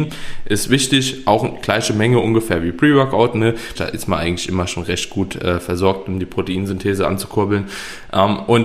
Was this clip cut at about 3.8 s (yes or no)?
yes